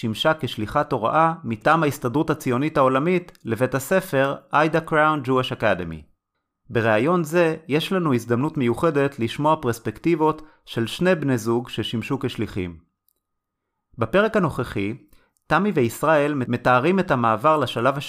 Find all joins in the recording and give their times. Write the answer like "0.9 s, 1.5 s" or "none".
6.5 s